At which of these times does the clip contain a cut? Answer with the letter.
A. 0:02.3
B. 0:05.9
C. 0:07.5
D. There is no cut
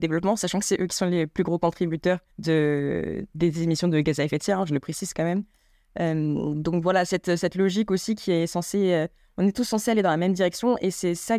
A